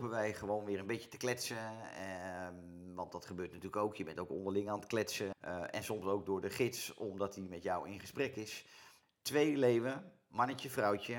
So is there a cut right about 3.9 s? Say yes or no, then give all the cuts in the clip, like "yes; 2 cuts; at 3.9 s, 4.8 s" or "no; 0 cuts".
no; 2 cuts; at 5.3 s, 9.0 s